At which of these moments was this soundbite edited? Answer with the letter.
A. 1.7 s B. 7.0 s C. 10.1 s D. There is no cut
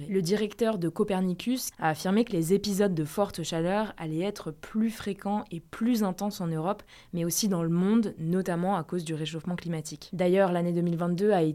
A